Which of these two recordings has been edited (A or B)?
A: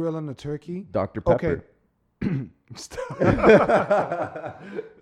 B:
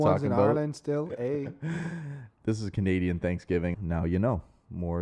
B